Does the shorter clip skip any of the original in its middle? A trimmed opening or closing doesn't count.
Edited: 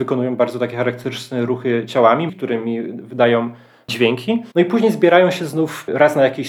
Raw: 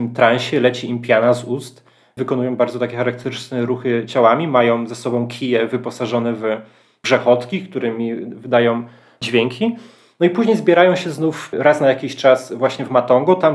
yes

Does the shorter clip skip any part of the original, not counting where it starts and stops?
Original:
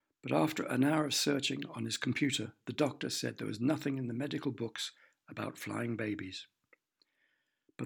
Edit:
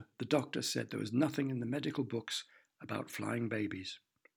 no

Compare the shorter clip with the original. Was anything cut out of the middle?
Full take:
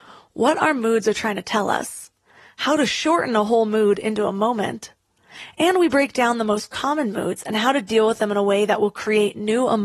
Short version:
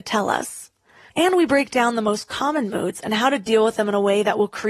yes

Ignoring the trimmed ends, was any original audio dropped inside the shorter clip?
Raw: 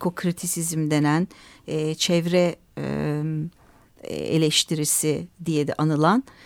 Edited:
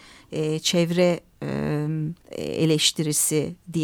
yes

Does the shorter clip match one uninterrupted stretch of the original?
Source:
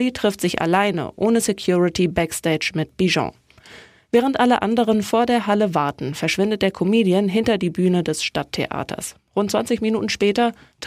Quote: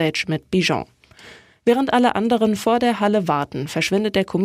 yes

